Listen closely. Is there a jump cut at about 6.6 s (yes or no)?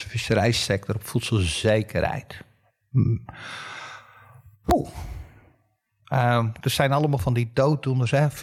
yes